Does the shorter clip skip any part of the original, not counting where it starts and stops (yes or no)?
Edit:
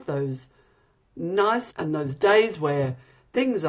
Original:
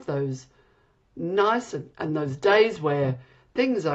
yes